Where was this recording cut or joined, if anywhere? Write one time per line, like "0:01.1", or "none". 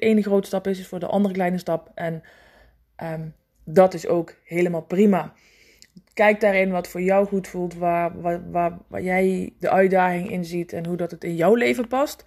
none